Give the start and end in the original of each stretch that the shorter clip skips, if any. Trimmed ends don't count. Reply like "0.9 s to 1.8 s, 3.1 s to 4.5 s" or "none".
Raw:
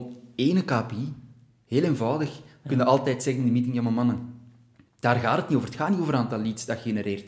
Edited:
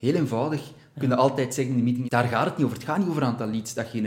3.7 s to 5.0 s